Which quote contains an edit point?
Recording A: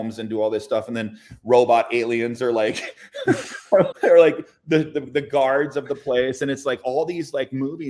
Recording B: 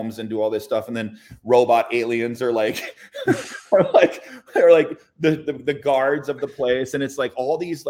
A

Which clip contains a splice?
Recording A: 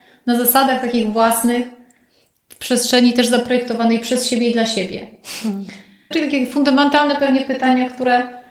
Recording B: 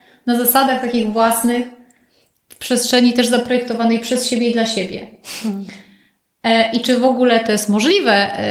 A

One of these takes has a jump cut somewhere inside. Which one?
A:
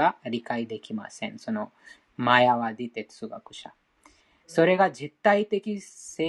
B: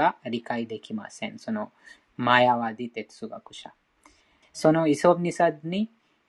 B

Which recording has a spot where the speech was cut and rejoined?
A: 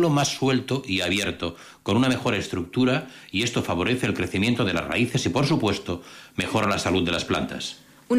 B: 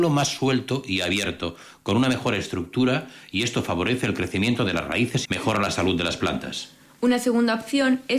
B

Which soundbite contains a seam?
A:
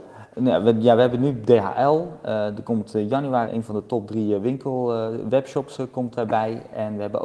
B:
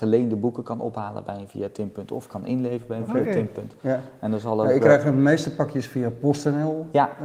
A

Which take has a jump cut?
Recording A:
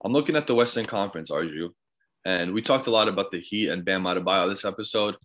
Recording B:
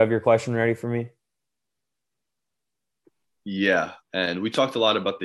B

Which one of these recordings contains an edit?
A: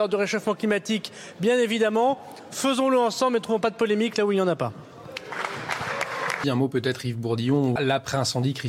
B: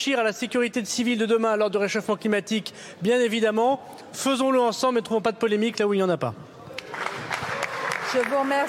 A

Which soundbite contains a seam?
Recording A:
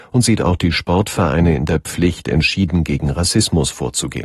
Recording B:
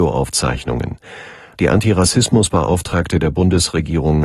B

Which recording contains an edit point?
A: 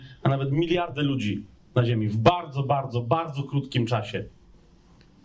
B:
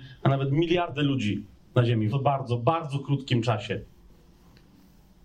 B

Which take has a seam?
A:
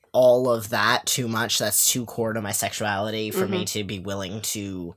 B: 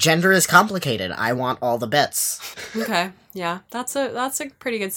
B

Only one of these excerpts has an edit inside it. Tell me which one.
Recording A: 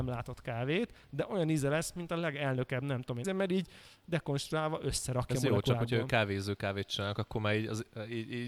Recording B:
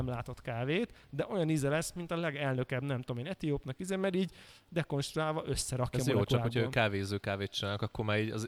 A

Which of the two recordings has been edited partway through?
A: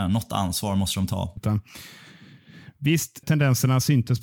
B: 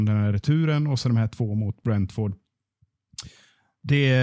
A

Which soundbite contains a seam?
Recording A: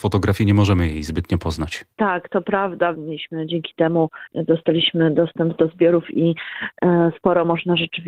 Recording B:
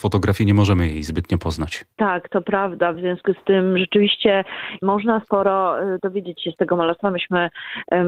A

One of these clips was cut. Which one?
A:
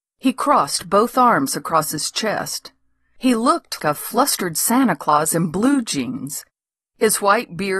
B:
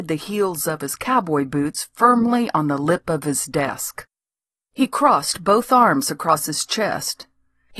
A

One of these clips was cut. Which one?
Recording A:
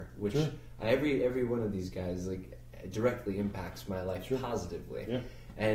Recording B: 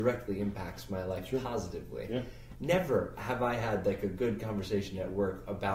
B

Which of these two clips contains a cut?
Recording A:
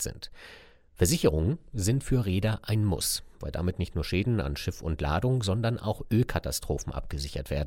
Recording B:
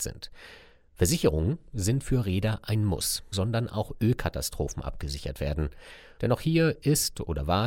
B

